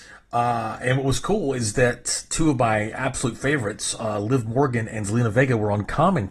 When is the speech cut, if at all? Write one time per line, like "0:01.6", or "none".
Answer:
none